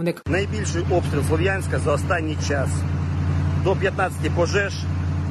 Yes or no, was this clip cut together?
no